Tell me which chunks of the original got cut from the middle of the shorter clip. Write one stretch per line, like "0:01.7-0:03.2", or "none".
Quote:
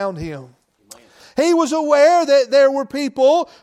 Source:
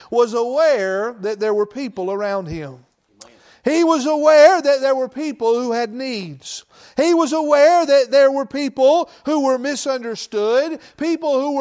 0:03.5-0:06.8